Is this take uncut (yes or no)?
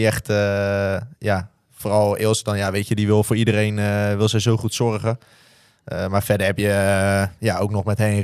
yes